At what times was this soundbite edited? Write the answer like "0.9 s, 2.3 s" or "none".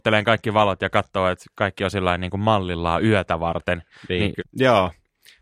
4.4 s